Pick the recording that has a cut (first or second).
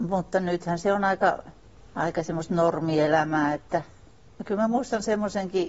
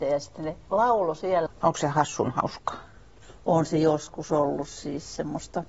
second